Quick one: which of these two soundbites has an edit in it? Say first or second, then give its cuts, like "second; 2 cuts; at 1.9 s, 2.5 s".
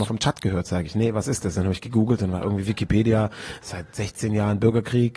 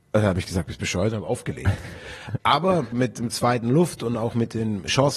second; 1 cut; at 2.9 s